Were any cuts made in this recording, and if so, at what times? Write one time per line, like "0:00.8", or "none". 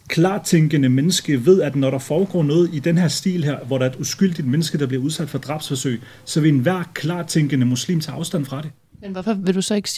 none